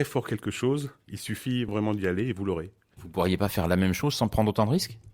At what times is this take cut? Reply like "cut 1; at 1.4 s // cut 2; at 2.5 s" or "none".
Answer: cut 1; at 3.0 s

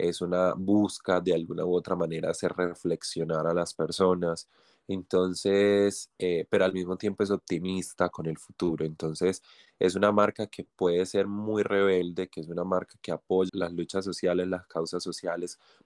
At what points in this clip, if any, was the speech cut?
cut 1; at 13.5 s

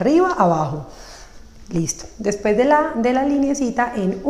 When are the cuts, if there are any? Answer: none

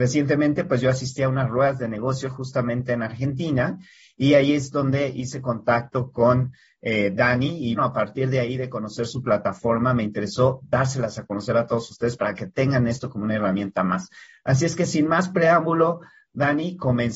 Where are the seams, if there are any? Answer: cut 1; at 7.8 s

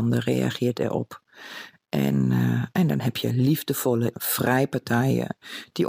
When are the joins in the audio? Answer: cut 1; at 4.1 s

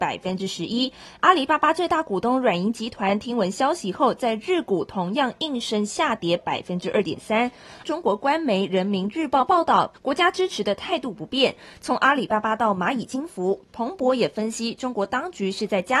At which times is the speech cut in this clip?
cut 1; at 7.8 s // cut 2; at 9.9 s

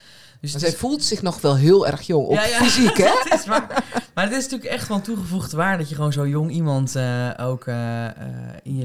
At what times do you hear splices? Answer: none

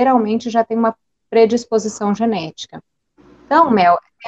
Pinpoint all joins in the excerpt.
none

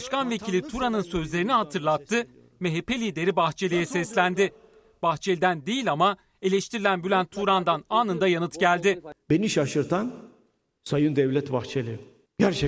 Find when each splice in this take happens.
none

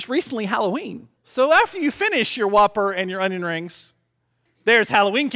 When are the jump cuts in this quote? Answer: cut 1; at 1.2 s

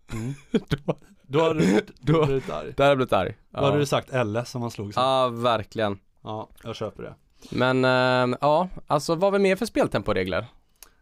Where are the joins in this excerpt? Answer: cut 1; at 9.2 s

